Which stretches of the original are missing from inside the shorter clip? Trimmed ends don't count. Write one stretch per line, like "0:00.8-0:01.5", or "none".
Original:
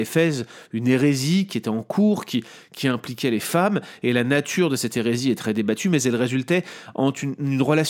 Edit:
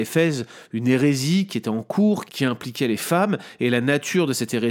0:02.3-0:02.7